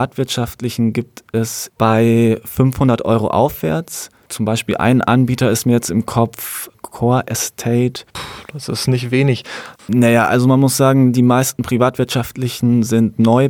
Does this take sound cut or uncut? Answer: cut